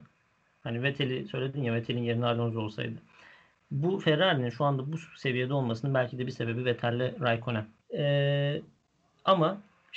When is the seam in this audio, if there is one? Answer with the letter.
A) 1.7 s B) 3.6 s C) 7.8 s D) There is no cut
C